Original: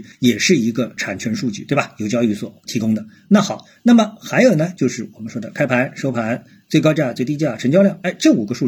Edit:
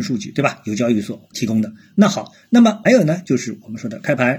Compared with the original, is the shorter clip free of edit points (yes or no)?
no